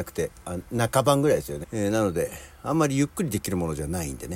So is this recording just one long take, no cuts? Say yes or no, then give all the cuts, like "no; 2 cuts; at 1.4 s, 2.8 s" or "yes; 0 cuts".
no; 1 cut; at 1.6 s